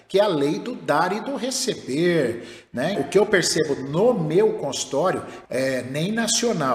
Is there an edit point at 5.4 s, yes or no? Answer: yes